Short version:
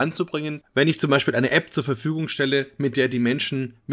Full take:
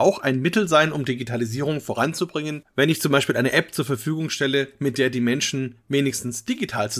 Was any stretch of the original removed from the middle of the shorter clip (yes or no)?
no